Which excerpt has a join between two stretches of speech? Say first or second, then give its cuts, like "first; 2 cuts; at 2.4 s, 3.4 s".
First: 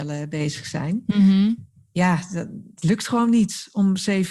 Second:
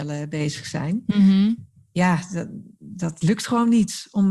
first; 1 cut; at 2.8 s